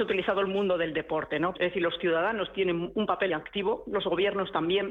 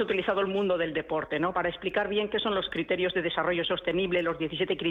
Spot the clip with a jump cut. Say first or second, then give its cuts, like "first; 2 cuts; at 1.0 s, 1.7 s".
first; 2 cuts; at 1.5 s, 3.3 s